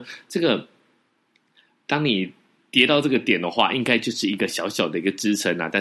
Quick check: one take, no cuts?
yes; 0 cuts

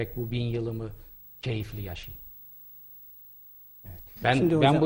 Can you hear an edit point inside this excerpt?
no; 0 cuts

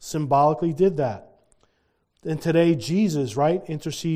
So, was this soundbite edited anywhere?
no; 0 cuts

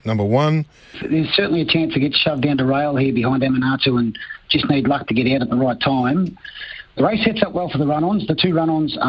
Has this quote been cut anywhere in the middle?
yes; 1 cut; at 0.9 s

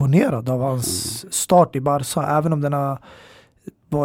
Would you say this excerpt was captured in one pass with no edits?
yes; 0 cuts

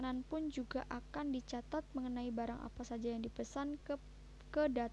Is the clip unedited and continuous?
yes; 0 cuts

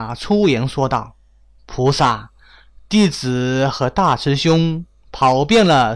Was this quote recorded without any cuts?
yes; 0 cuts

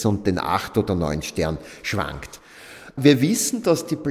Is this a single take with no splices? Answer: yes; 0 cuts

